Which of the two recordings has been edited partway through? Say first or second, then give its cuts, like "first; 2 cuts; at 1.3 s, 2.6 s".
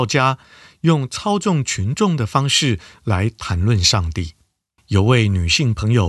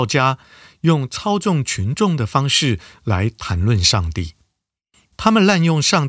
first; 1 cut; at 4.8 s